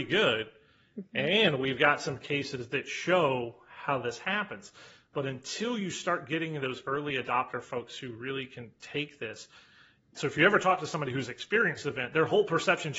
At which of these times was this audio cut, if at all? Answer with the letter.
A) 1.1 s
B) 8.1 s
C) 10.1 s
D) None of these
C